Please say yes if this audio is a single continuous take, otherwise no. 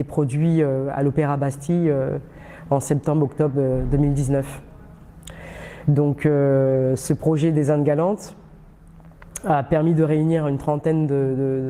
yes